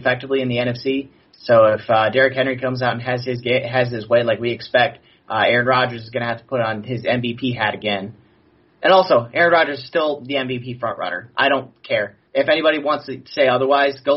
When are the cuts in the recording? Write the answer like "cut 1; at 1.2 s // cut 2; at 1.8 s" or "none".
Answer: cut 1; at 12.3 s